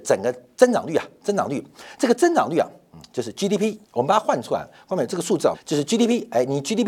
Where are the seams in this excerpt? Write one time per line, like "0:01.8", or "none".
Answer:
0:03.8
0:05.5